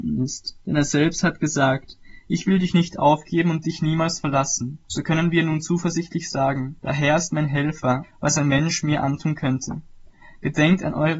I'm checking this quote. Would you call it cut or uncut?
cut